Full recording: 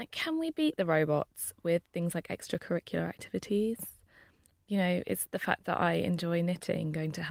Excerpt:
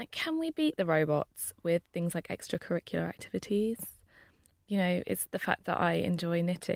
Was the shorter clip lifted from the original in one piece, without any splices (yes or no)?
yes